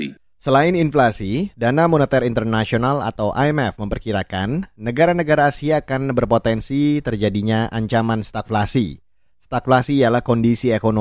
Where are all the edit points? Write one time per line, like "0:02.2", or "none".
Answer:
none

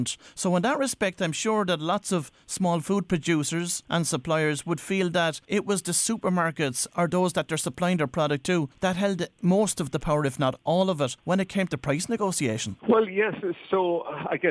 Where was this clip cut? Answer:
0:12.8

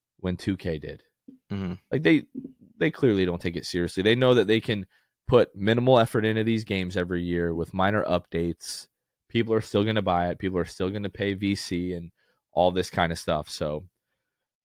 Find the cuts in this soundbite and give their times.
none

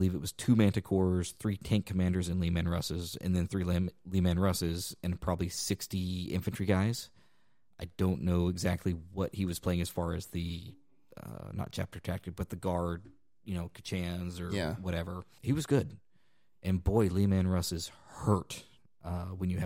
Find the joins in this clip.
none

